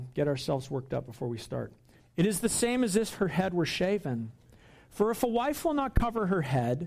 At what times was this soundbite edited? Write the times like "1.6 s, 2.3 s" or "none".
2.0 s